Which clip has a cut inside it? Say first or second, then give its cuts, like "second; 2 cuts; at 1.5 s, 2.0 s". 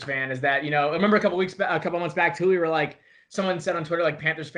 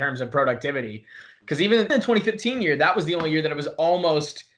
second; 1 cut; at 1.9 s